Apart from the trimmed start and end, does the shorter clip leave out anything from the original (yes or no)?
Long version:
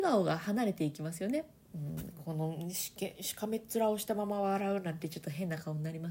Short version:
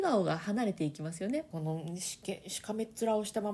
yes